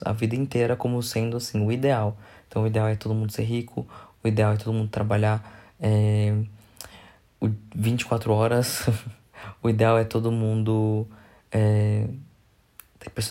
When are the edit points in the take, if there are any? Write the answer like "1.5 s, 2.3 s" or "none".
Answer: none